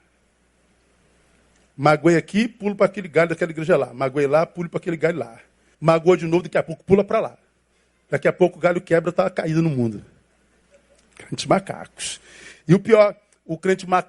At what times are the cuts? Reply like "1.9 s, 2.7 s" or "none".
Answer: 5.7 s